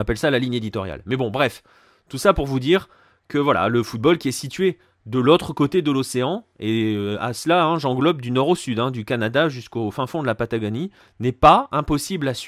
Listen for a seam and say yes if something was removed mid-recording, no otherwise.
no